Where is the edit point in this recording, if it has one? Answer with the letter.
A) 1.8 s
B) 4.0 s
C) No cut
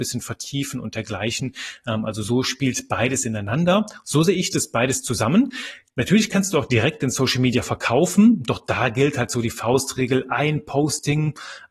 B